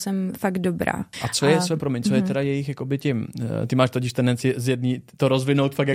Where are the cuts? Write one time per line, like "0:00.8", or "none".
0:01.1

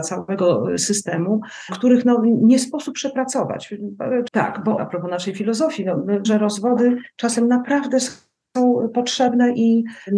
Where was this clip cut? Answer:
0:04.3
0:06.2

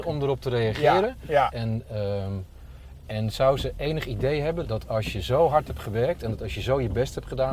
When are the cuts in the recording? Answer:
0:01.5
0:04.6

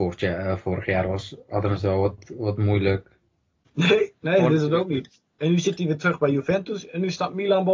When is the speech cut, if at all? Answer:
0:03.6

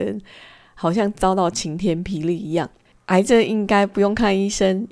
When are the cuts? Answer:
0:02.9

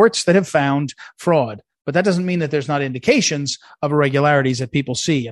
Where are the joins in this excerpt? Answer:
none

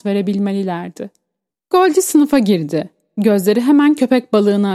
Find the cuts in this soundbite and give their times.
0:01.5

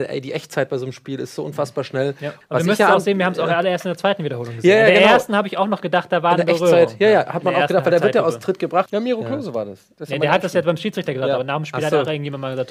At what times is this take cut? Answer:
0:02.4
0:08.9

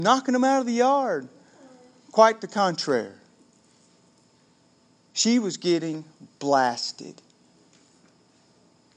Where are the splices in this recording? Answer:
none

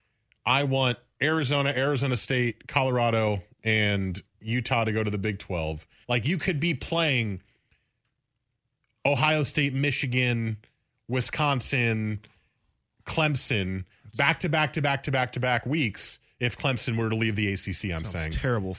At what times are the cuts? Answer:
0:06.0

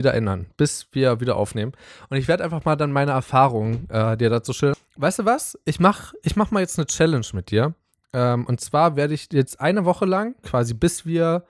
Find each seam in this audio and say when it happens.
0:04.7
0:10.4

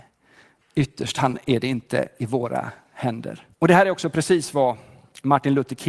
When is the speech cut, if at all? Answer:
0:03.5

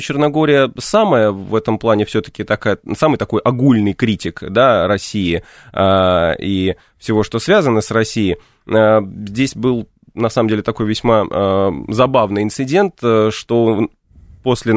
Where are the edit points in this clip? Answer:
none

